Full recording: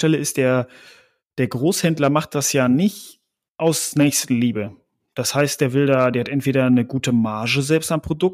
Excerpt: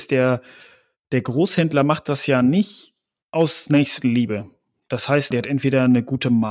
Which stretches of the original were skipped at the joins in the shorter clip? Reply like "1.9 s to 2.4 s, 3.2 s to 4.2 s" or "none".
5.6 s to 6.1 s